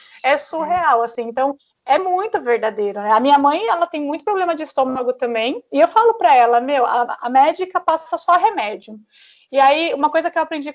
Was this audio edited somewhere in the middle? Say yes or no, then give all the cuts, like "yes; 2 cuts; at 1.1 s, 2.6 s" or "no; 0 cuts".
no; 0 cuts